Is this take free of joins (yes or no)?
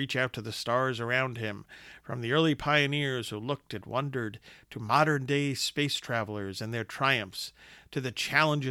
yes